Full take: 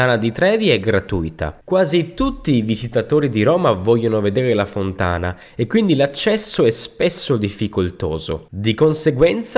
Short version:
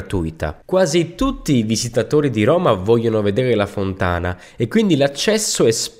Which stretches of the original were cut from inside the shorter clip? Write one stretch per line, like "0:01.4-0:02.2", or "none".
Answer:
none